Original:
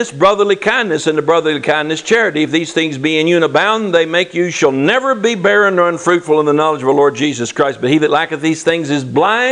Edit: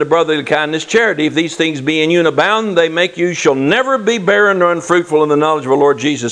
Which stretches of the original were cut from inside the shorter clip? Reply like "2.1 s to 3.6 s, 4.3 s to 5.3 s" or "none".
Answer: none